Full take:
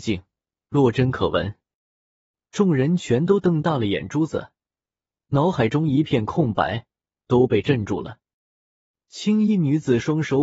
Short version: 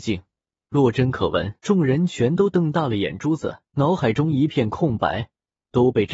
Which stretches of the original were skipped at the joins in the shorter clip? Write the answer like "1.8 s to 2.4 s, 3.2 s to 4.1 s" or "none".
1.6 s to 2.5 s, 4.6 s to 5.3 s